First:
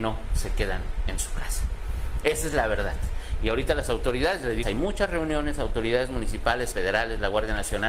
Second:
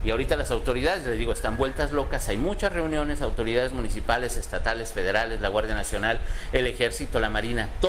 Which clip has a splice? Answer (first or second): first